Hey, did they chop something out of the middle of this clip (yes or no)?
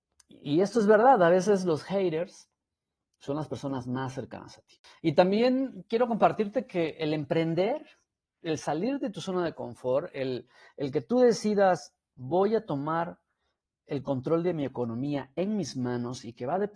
no